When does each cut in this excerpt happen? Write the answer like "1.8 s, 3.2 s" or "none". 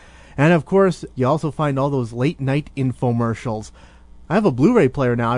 1.1 s, 4.2 s